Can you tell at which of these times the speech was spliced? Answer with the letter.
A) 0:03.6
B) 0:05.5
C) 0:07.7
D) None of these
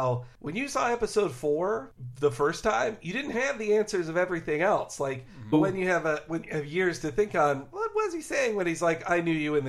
B